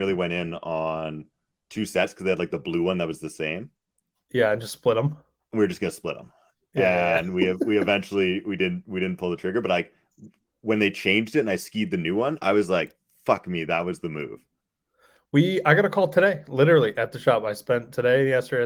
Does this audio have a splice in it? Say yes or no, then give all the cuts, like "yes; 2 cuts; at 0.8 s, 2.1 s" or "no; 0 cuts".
no; 0 cuts